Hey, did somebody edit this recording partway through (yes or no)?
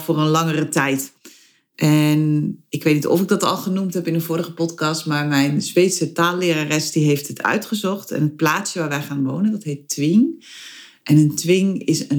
no